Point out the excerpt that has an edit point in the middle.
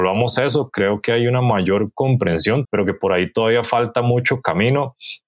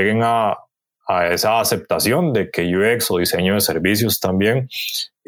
first; 1 cut; at 2.6 s

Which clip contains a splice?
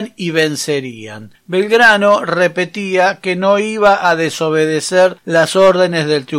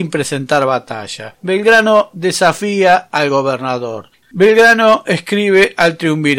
second; 1 cut; at 4.2 s

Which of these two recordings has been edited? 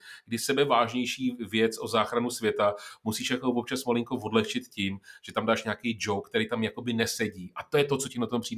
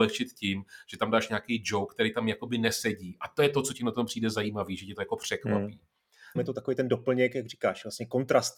second; 1 cut; at 6.4 s

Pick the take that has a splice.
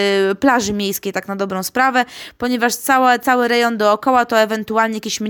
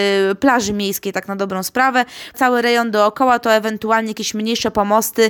second; 1 cut; at 2.3 s

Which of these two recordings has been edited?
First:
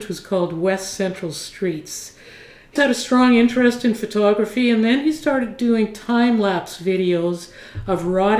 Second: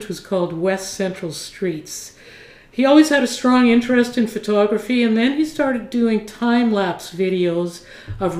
first; 1 cut; at 2.8 s

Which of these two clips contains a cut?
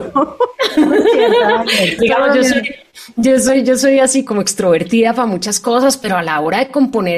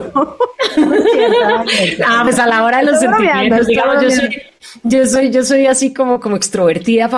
first; 2 cuts; at 2.0 s, 4.3 s

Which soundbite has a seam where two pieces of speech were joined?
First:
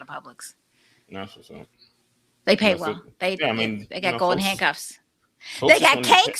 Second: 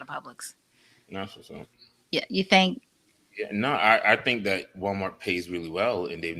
second; 1 cut; at 2.0 s

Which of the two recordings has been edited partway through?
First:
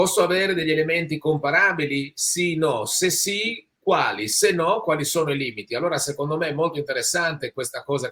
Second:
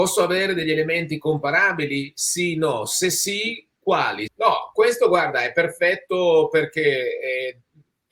second; 1 cut; at 4.3 s

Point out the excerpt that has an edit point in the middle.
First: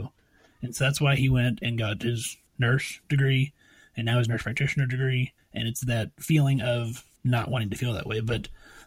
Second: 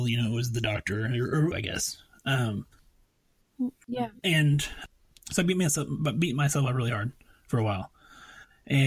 second; 1 cut; at 1.5 s

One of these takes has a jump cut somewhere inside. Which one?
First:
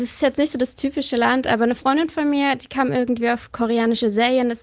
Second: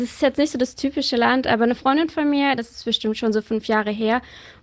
second; 1 cut; at 2.6 s

